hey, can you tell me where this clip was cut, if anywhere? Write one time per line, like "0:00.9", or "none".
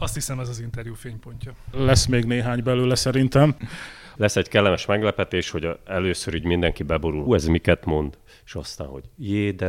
0:04.1
0:07.3